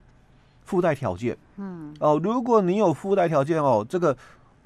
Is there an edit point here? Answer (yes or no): no